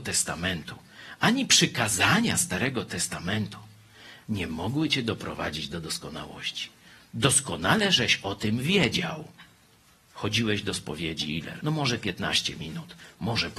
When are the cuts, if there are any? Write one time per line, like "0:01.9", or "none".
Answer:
0:10.1
0:11.6